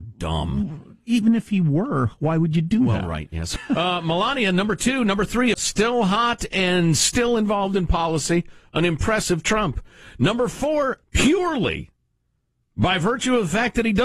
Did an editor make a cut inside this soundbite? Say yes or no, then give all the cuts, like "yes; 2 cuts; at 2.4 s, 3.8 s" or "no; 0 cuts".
yes; 3 cuts; at 3.6 s, 5.5 s, 11.0 s